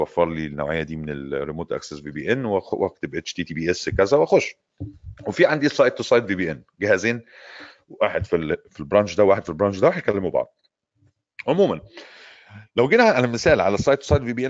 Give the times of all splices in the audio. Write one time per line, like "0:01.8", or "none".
0:05.2